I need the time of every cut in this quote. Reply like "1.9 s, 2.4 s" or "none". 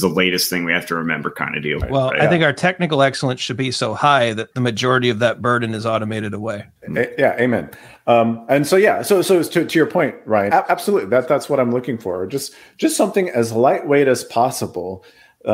6.8 s, 10.5 s